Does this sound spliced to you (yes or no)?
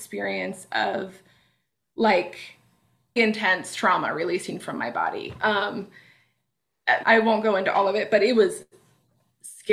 yes